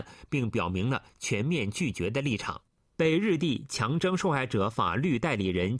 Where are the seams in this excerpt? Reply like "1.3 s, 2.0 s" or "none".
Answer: 3.0 s